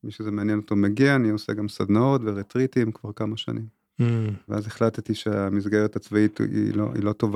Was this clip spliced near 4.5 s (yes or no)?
yes